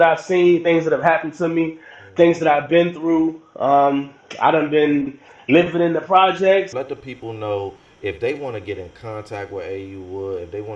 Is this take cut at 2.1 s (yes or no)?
no